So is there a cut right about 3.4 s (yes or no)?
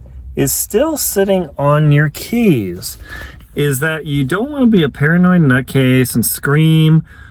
yes